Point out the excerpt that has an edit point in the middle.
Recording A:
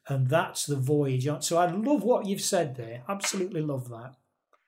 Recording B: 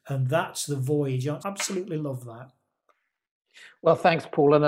B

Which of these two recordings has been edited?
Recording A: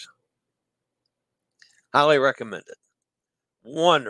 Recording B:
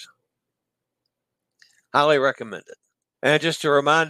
B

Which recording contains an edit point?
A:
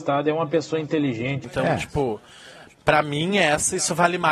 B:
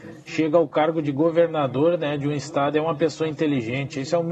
A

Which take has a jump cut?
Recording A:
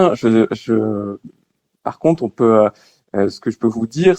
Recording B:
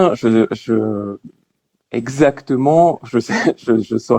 A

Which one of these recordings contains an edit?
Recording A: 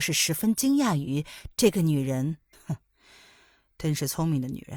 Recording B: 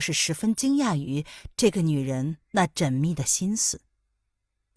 A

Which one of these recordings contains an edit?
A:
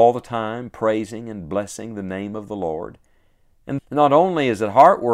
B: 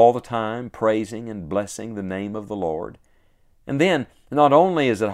A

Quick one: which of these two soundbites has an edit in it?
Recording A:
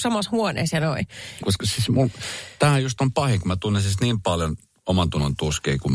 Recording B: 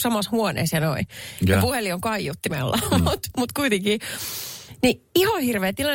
A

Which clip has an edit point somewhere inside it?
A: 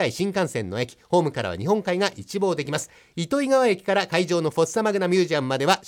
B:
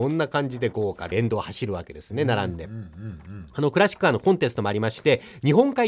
B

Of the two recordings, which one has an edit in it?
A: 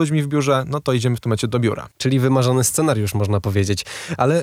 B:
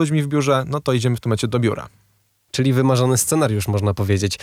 A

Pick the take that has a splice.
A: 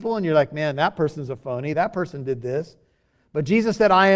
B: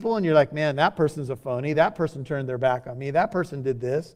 A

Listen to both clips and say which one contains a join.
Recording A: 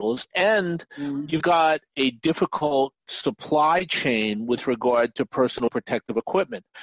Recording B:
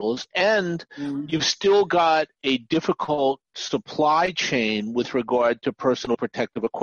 A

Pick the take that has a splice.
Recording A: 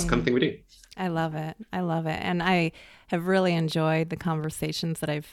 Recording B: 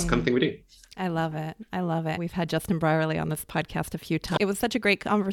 B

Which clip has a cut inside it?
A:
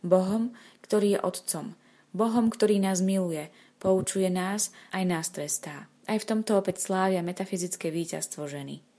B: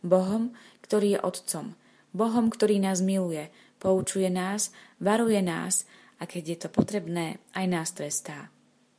A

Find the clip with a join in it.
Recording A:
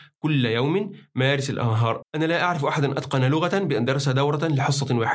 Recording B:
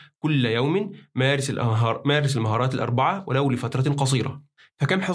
A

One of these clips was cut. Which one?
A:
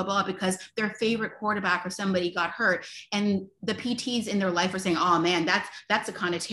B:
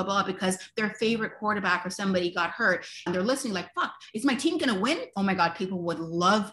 B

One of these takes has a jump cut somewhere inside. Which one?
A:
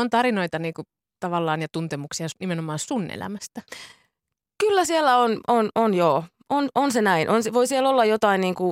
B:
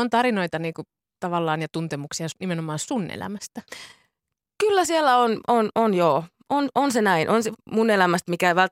B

